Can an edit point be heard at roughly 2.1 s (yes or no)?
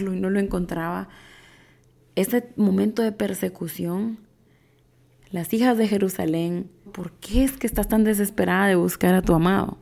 no